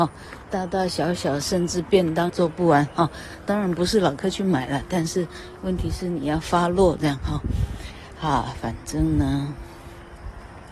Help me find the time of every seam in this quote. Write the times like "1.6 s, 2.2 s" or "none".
2.3 s